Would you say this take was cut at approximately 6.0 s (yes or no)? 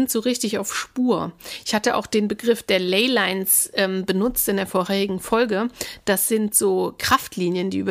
no